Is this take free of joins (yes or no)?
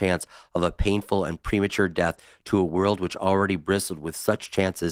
yes